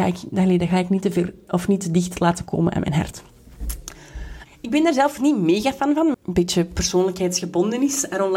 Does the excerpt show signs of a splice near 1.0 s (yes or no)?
no